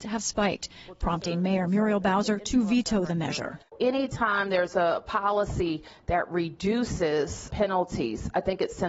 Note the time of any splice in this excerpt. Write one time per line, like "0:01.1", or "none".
0:07.5